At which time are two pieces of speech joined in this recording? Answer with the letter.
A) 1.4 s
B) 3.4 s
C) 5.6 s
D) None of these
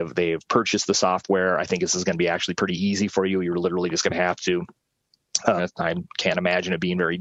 C